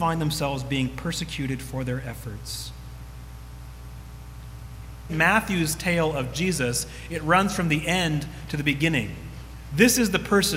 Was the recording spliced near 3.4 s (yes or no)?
no